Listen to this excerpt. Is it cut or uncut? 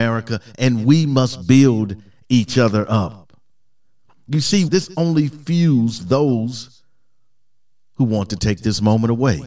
cut